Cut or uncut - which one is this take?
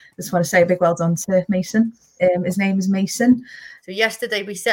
cut